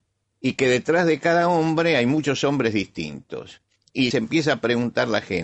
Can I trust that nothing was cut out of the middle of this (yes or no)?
no